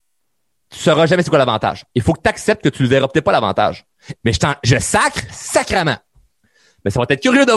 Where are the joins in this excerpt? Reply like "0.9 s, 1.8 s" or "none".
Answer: 4.2 s, 5.3 s